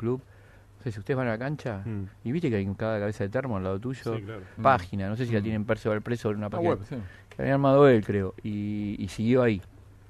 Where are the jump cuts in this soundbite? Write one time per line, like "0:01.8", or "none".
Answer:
0:04.6